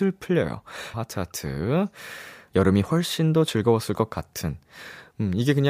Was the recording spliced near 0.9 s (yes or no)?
yes